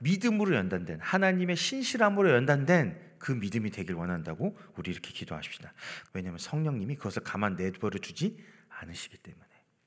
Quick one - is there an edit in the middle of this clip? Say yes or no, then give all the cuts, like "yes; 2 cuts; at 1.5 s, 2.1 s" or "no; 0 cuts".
yes; 1 cut; at 6.0 s